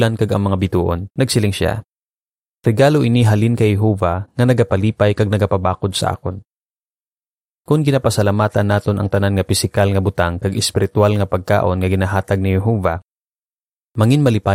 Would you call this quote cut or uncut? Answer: cut